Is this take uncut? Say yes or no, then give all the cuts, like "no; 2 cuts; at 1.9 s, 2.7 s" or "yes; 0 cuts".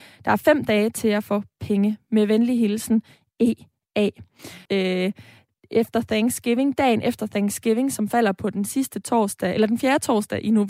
no; 1 cut; at 4.7 s